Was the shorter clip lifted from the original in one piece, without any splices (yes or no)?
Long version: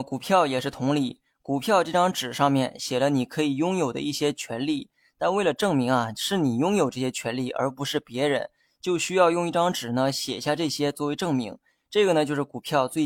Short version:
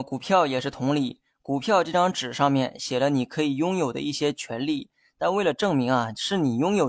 yes